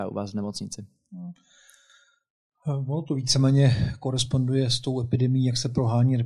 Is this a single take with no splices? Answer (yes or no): yes